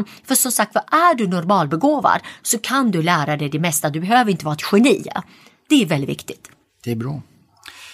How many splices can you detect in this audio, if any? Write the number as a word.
zero